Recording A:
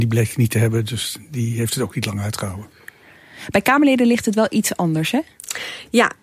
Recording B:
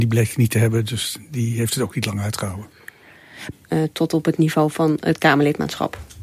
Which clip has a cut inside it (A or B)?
B